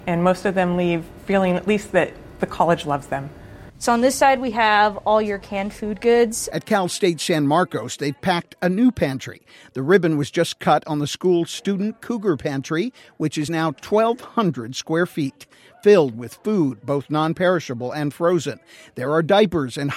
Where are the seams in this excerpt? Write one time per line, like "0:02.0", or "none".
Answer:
none